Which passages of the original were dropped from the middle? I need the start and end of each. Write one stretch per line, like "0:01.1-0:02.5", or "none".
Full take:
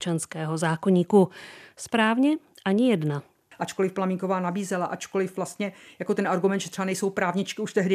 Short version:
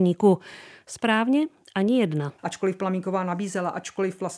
0:03.3-0:03.5